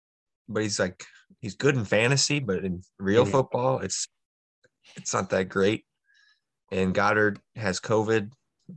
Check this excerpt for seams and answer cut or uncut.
uncut